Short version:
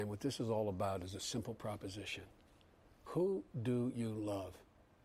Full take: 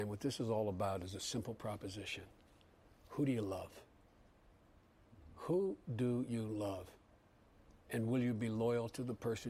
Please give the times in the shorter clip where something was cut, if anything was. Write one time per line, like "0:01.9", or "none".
0:03.1